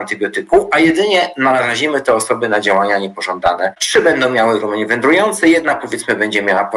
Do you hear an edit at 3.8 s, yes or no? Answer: yes